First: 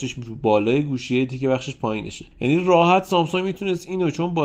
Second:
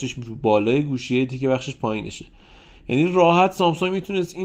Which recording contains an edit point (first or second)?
first